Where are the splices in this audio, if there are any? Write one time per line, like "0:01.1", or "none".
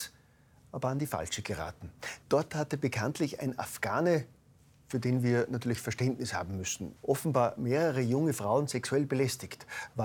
0:02.2
0:07.0